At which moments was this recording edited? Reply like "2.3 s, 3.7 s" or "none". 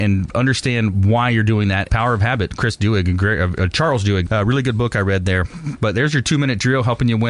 1.9 s, 4.3 s